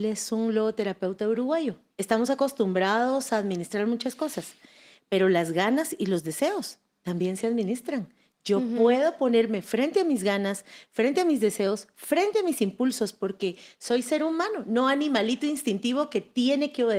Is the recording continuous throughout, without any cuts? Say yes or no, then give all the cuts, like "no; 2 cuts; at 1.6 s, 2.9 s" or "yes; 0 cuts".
no; 1 cut; at 1.9 s